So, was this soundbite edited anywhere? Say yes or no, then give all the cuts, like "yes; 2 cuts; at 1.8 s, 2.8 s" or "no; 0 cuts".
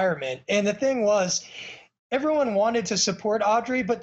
no; 0 cuts